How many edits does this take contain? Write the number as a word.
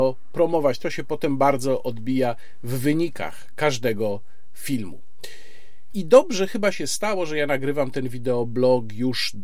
one